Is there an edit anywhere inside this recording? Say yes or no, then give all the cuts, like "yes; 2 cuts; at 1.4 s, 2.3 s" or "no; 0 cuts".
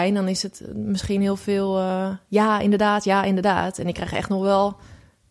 no; 0 cuts